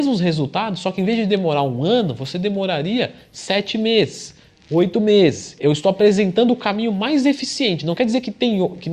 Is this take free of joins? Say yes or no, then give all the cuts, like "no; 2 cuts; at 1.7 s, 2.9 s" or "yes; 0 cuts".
no; 1 cut; at 5.6 s